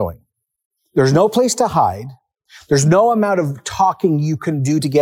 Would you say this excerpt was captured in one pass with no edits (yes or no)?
yes